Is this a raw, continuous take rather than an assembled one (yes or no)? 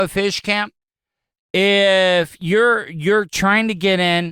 yes